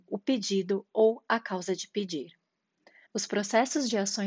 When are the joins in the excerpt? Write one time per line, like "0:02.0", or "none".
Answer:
0:03.1